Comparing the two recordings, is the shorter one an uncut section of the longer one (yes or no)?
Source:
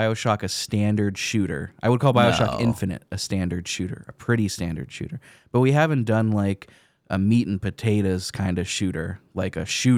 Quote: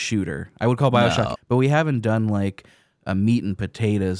no